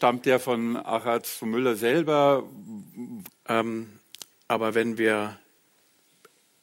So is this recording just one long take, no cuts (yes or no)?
no